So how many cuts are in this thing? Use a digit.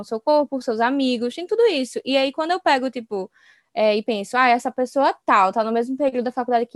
0